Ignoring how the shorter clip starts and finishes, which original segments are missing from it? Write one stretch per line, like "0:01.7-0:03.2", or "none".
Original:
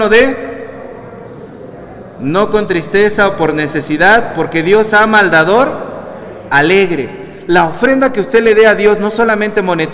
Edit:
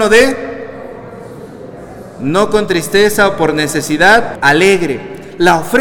0:04.3-0:06.4